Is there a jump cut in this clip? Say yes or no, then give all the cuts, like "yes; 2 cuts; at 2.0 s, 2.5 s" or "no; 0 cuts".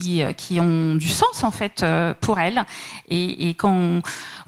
no; 0 cuts